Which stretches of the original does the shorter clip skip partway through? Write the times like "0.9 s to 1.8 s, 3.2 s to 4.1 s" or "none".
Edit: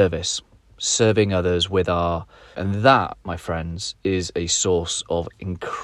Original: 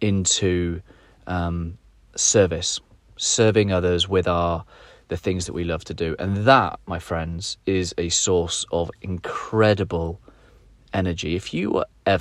4.9 s to 6.2 s